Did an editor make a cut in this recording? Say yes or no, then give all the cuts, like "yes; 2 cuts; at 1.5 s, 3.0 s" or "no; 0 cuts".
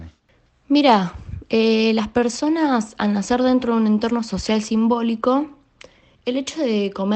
no; 0 cuts